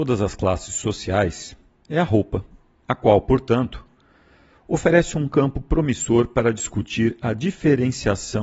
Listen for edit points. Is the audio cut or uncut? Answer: uncut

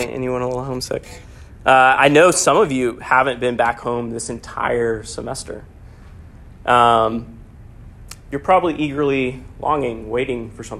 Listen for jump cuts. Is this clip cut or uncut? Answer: uncut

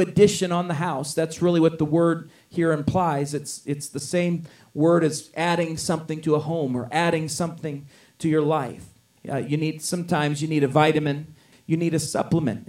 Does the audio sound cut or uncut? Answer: cut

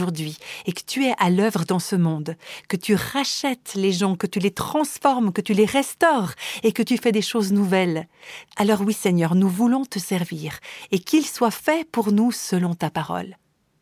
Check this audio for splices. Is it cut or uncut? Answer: cut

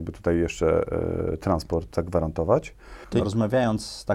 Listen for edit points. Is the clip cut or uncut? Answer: cut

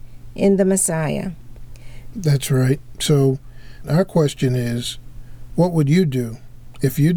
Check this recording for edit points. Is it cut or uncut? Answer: cut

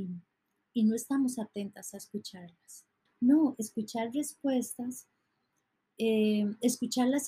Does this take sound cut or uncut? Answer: cut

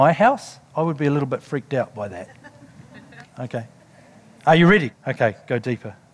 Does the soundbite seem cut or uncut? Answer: cut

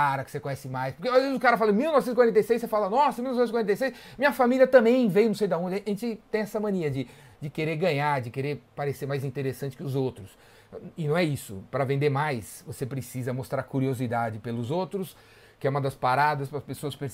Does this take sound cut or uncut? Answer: uncut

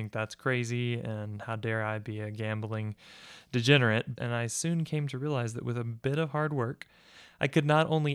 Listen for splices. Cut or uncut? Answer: cut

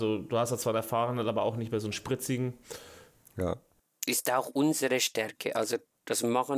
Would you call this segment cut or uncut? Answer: cut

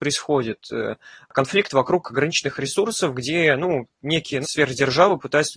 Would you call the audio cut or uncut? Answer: cut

